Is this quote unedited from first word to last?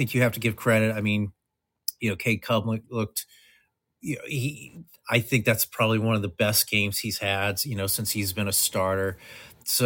yes; 0 cuts

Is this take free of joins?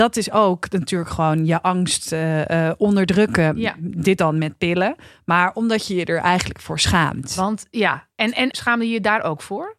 no; 1 cut; at 8.5 s

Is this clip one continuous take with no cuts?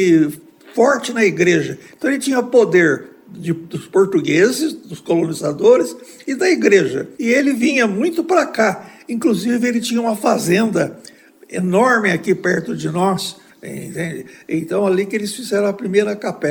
no; 2 cuts; at 7.1 s, 13.5 s

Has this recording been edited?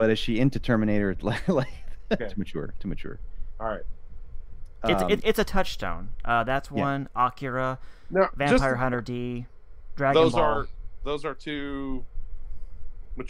yes; 1 cut; at 2.2 s

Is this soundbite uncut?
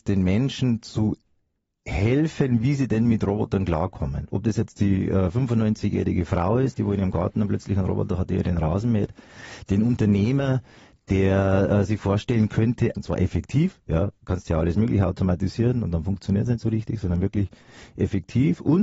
no; 1 cut; at 12.9 s

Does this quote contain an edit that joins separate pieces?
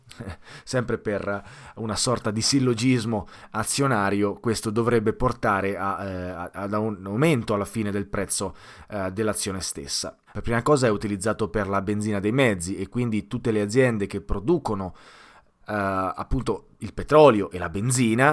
yes; 2 cuts; at 10.3 s, 15.6 s

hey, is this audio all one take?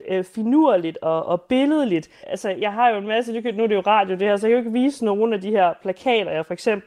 no; 1 cut; at 2.2 s

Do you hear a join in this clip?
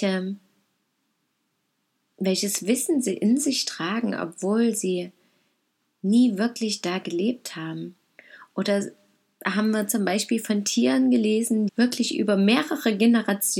yes; 1 cut; at 11.7 s

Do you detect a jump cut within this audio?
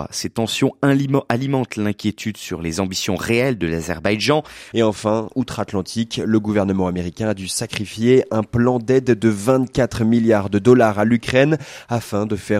yes; 1 cut; at 4.7 s

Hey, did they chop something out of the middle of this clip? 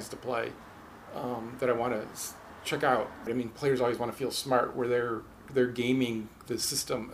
yes; 1 cut; at 3.3 s

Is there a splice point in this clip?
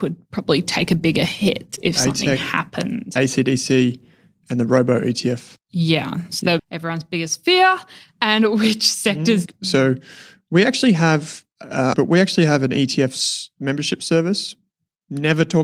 yes; 3 cuts; at 6.6 s, 9.5 s, 11.9 s

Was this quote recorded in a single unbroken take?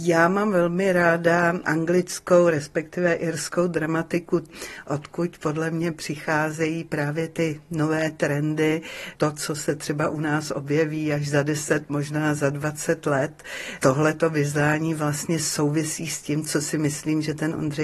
yes; 0 cuts

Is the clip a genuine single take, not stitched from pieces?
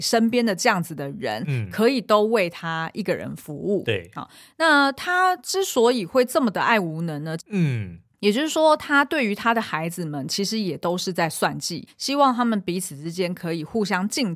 no; 2 cuts; at 7.4 s, 11.9 s

